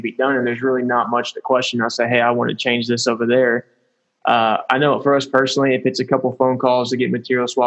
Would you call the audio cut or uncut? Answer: uncut